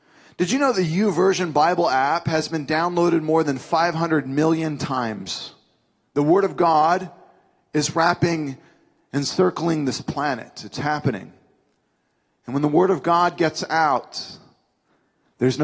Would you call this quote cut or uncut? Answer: cut